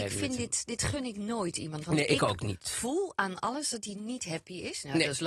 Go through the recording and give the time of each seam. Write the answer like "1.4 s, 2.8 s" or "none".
none